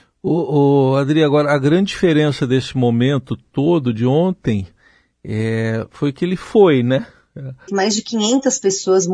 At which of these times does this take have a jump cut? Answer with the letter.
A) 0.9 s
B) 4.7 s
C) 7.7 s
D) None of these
C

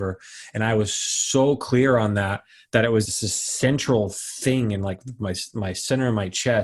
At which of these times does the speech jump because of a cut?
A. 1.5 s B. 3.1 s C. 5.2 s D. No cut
B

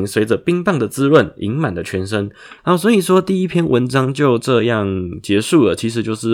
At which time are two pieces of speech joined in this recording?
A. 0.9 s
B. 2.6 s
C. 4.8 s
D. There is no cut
B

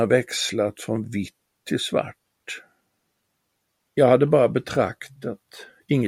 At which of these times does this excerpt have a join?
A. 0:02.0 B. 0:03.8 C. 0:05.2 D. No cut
B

